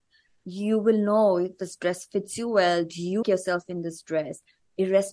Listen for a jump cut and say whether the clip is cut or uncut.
cut